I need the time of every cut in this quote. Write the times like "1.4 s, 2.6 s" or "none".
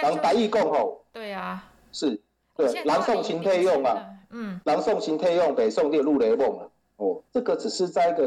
7.3 s